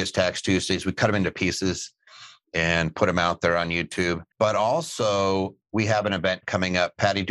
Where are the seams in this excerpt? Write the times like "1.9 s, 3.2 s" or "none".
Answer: 4.3 s